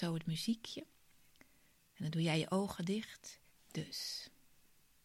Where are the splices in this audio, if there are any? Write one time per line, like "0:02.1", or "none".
0:03.5